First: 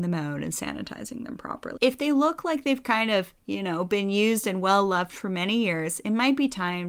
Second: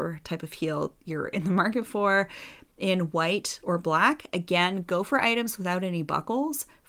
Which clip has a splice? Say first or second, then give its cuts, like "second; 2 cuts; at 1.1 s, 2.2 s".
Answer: first; 1 cut; at 1.8 s